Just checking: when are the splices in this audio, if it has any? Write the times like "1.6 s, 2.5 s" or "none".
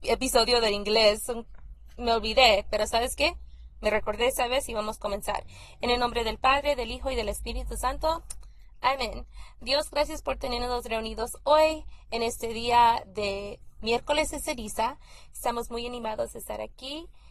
none